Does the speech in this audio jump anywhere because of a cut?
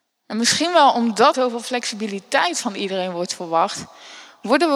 yes; 1 cut; at 1.3 s

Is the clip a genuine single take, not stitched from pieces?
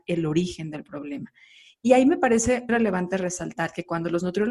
no; 1 cut; at 2.7 s

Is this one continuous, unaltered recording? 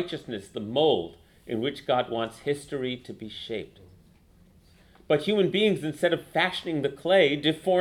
yes; 0 cuts

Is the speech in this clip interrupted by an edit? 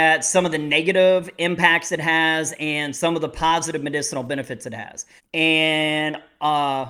yes; 1 cut; at 5.2 s

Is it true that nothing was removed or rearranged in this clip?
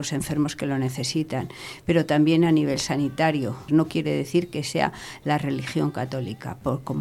no; 1 cut; at 3.7 s

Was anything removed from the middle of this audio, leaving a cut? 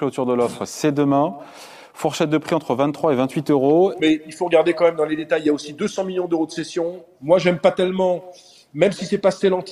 yes; 1 cut; at 4.0 s

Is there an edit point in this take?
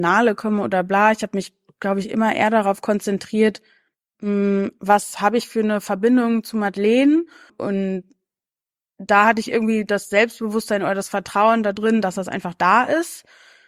yes; 1 cut; at 7.5 s

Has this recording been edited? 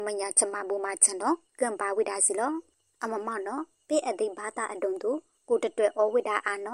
no; 0 cuts

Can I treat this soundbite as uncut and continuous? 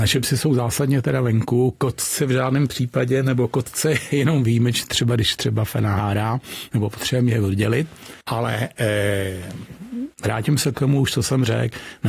no; 2 cuts; at 8.2 s, 10.1 s

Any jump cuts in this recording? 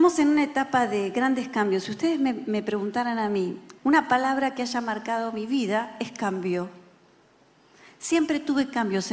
yes; 1 cut; at 3.8 s

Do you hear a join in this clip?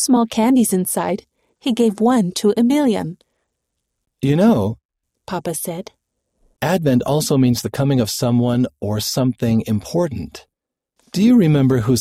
no; 0 cuts

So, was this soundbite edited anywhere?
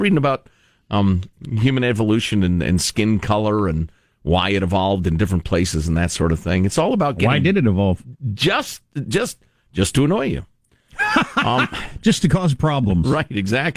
no; 0 cuts

